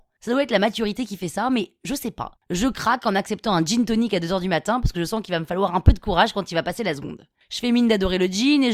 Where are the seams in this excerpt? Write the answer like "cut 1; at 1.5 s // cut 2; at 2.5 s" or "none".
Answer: cut 1; at 2.4 s